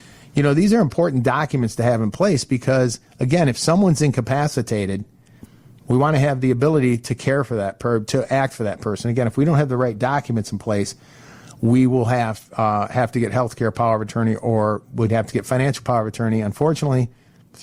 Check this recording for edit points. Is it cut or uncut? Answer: uncut